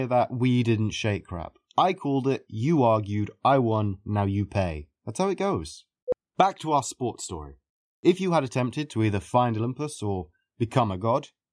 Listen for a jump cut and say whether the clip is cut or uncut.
uncut